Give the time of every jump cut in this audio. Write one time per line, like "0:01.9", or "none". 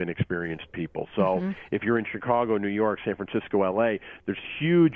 none